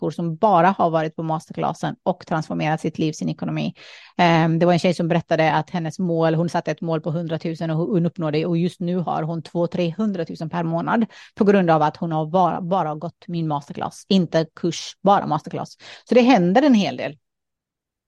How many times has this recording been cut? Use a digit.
0